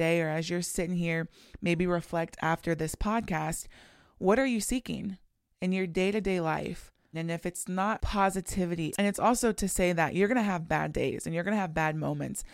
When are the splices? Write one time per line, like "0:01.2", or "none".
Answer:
0:07.1
0:08.9